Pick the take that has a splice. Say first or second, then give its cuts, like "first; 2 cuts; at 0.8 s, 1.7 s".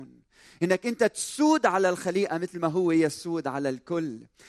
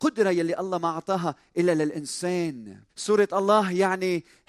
second; 1 cut; at 2.9 s